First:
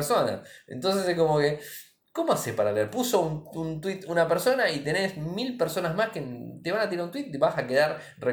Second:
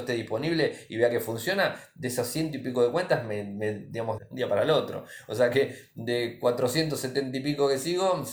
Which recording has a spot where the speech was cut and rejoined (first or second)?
second